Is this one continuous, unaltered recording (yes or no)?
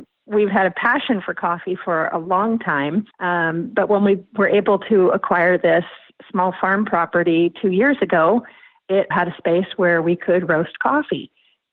no